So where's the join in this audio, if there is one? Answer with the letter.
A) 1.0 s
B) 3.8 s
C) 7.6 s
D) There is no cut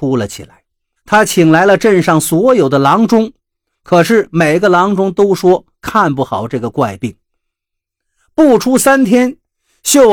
A